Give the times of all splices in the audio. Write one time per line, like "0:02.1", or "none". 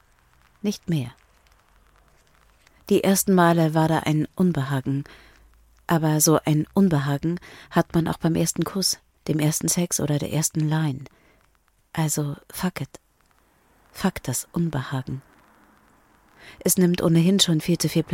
none